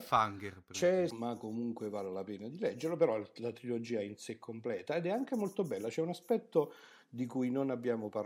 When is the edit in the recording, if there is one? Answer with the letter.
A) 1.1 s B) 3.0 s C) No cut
A